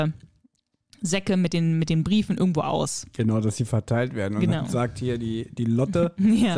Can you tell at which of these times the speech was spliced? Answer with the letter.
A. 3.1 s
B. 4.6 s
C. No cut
C